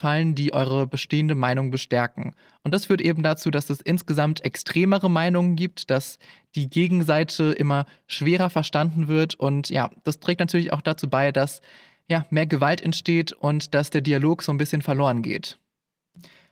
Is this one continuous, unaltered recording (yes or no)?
yes